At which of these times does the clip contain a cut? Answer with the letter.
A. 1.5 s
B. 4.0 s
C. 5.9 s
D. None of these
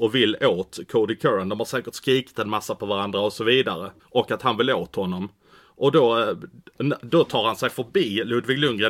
B